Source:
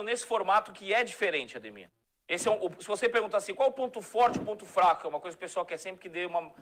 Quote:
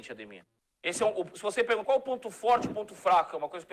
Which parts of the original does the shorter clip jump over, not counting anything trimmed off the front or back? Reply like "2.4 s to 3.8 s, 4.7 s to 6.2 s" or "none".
3.3 s to 3.6 s